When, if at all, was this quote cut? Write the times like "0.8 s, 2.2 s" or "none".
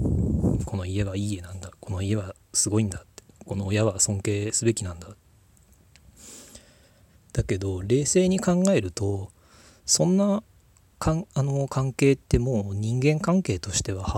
none